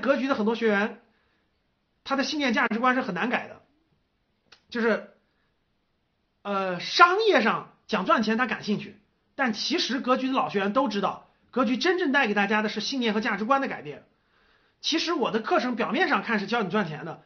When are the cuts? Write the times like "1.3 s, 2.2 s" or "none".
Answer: none